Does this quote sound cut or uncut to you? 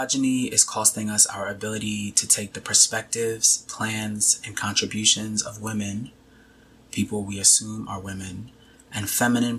uncut